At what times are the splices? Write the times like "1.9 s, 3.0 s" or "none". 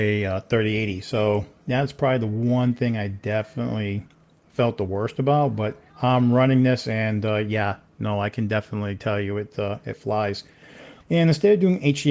5.9 s, 11.0 s